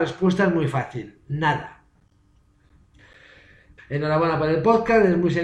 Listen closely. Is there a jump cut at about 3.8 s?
yes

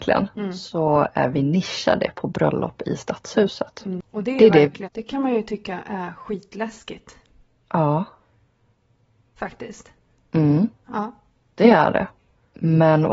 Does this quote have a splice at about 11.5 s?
no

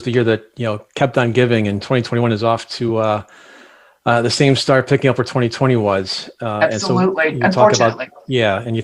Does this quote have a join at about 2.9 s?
no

